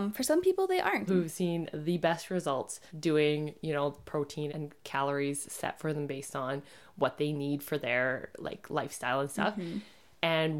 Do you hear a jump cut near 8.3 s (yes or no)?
no